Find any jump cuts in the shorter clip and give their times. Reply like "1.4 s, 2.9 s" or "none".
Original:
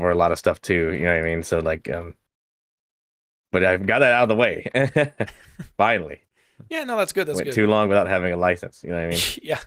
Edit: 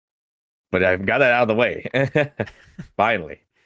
none